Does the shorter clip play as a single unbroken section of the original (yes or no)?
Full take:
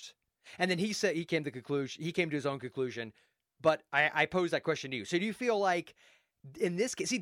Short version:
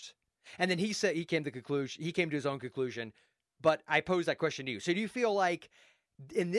no